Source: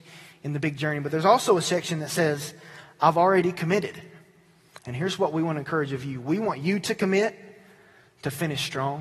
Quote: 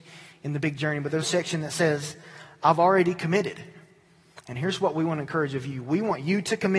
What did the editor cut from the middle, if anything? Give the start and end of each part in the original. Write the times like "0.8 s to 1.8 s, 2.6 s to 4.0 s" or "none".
1.2 s to 1.6 s